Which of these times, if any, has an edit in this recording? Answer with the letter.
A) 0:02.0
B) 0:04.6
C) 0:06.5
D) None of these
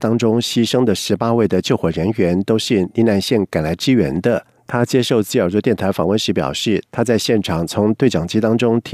B